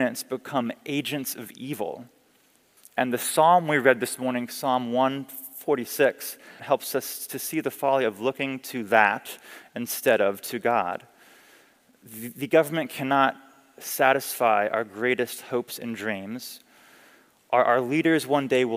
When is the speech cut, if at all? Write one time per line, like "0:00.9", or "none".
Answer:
0:02.8
0:06.6